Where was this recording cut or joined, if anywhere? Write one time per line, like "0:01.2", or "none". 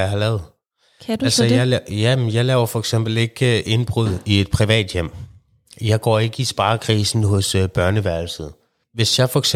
none